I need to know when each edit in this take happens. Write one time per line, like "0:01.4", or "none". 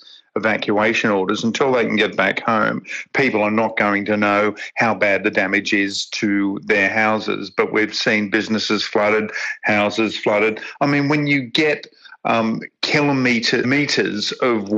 0:13.6